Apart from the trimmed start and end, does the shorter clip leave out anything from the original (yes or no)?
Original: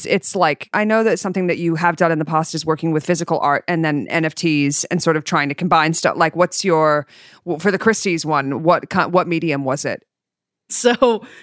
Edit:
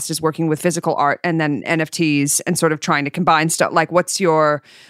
no